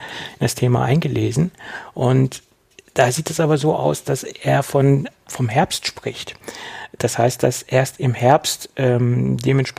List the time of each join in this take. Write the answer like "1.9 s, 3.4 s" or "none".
5.3 s